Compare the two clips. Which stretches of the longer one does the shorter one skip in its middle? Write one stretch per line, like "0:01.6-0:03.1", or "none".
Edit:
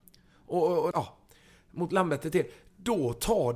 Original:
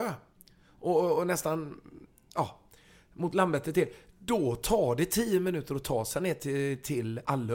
0:01.2-0:02.3